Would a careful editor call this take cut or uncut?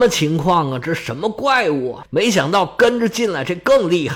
uncut